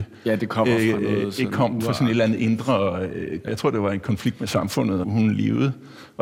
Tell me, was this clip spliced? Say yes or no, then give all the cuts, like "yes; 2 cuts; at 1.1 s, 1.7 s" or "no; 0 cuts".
yes; 2 cuts; at 3.5 s, 5.0 s